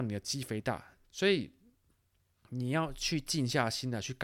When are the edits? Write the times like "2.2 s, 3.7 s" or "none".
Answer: 1.0 s